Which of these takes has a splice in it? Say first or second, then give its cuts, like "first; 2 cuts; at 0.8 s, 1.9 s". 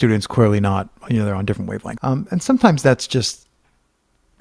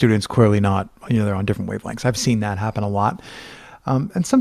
first; 1 cut; at 2.0 s